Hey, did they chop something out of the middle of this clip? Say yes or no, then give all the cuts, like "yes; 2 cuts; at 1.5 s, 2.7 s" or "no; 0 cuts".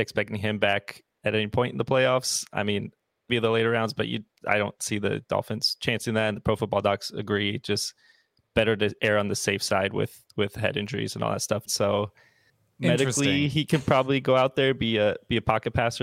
yes; 2 cuts; at 3.3 s, 11.7 s